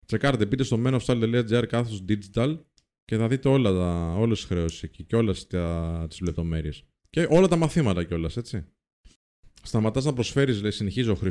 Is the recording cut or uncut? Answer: uncut